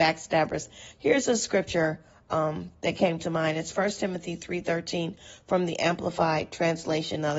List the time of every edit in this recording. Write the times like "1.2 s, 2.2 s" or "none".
0.9 s